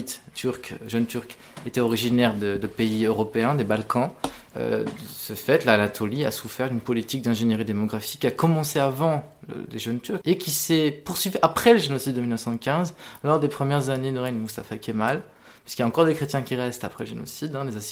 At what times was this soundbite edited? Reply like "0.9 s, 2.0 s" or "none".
4.5 s, 10.2 s